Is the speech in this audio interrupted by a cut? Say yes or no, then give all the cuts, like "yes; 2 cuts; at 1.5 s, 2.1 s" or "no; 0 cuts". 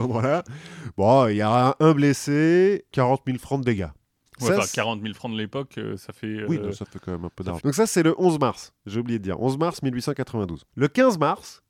yes; 2 cuts; at 4.3 s, 7.6 s